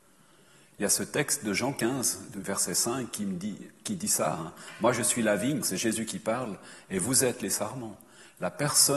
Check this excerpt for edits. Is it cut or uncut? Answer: cut